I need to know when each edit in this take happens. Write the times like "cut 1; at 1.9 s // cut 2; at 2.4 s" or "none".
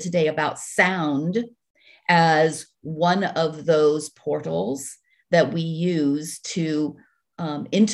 none